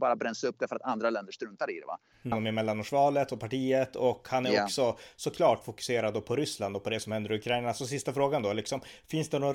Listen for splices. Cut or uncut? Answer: cut